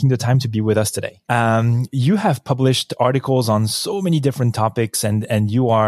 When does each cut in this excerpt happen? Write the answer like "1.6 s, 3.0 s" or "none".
1.2 s